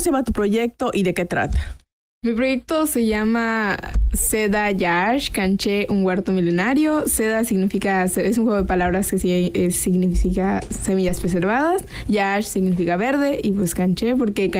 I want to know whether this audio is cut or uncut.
uncut